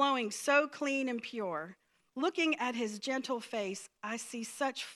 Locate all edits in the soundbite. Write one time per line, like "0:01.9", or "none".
none